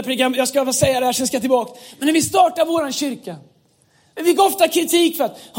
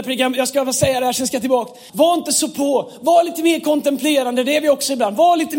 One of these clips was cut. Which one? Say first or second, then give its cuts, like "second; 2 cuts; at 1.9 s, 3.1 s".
second; 1 cut; at 1.9 s